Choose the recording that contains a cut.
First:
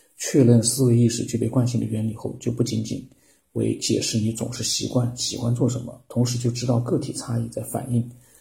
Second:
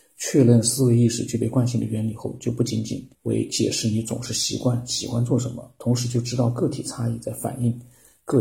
second; 1 cut; at 3.1 s

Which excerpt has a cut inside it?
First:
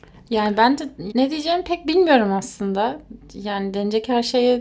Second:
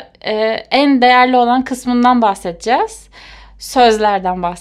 first; 1 cut; at 1.1 s

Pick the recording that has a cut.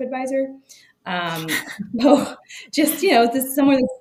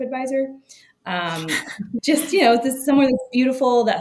second; 1 cut; at 2.0 s

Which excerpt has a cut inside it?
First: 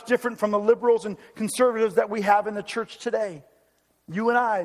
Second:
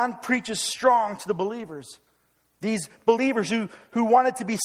second; 1 cut; at 2.5 s

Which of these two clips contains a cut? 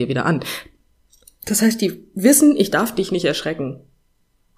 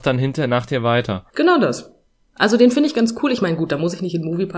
second; 1 cut; at 1.3 s

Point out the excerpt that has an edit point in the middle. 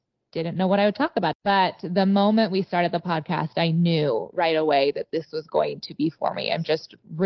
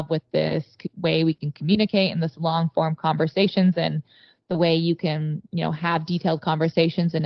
first; 1 cut; at 1.3 s

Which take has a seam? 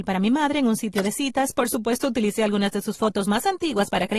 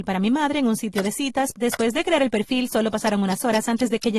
second; 1 cut; at 1.5 s

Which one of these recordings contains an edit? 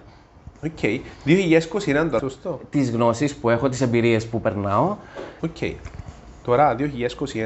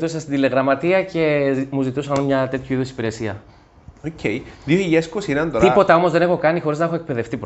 first; 2 cuts; at 2.2 s, 5.4 s

